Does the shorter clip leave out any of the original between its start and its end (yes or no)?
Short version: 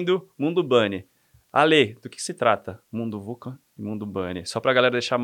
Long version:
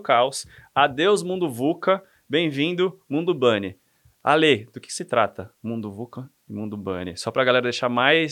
no